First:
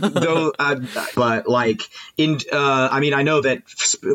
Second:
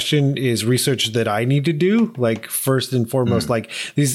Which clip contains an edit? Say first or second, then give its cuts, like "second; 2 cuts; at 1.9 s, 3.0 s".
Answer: first; 1 cut; at 1.1 s